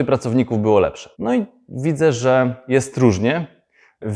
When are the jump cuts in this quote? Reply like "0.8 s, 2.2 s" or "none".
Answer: 1.1 s

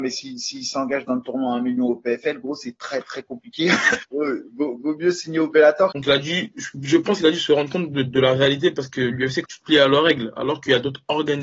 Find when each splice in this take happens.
4.1 s, 5.9 s, 9.4 s

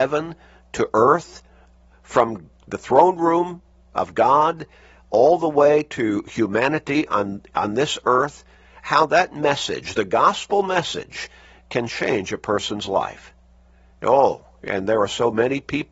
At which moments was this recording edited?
none

